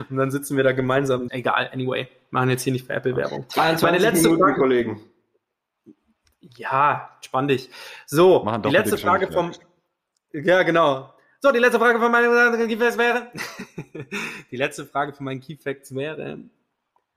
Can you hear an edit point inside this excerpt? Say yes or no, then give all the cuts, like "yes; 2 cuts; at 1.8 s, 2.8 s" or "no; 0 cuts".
yes; 1 cut; at 1.3 s